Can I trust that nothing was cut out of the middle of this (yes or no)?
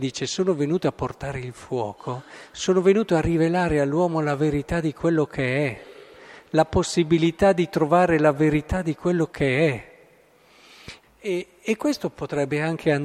no